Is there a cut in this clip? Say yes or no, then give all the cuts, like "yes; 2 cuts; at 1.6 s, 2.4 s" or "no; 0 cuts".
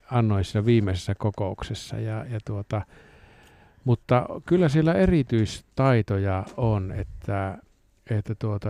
no; 0 cuts